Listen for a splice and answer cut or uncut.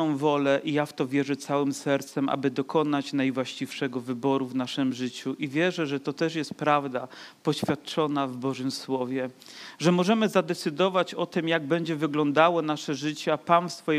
uncut